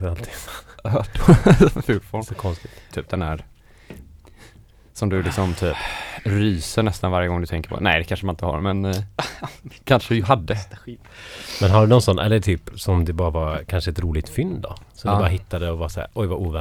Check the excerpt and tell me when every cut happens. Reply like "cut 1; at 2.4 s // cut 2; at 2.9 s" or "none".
cut 1; at 2.9 s